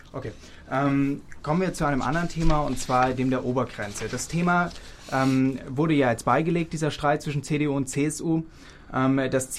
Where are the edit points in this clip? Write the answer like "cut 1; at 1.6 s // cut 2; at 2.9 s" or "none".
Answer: none